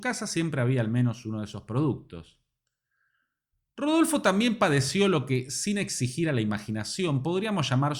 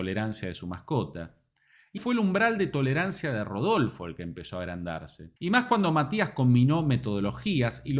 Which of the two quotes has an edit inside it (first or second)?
second